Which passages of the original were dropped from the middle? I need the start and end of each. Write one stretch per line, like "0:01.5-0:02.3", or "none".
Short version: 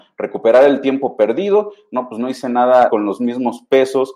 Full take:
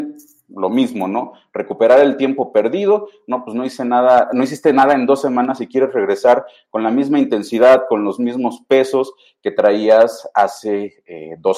0:04.3-0:07.9